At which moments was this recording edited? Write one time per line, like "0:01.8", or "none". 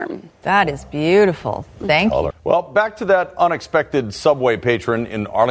0:02.3